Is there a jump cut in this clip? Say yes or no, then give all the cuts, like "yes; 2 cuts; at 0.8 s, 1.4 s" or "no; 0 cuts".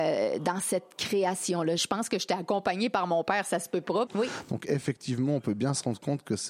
yes; 2 cuts; at 1.8 s, 4.1 s